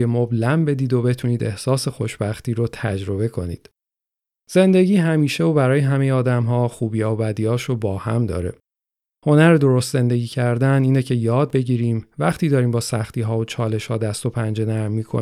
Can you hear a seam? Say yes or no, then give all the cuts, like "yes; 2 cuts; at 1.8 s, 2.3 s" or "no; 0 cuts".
no; 0 cuts